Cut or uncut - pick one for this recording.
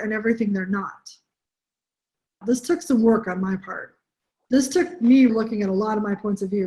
cut